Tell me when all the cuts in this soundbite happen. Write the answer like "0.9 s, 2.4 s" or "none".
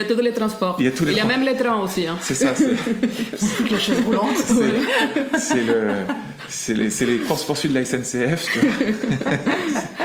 none